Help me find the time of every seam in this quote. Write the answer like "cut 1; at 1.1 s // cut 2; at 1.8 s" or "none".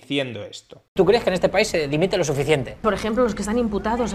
none